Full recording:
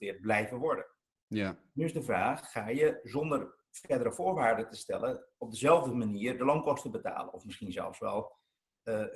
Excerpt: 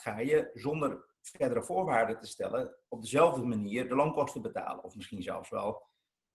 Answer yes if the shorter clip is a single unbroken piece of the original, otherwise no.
yes